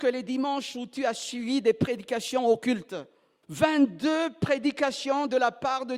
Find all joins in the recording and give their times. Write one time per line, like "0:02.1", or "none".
0:03.4